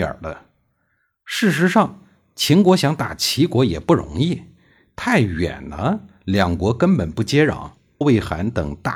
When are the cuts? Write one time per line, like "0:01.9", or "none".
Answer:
0:08.0

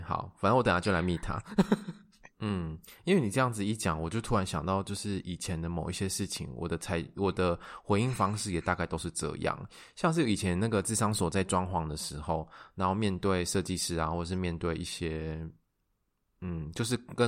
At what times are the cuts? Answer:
0:02.3

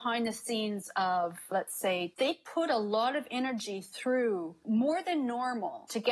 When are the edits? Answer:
0:02.1

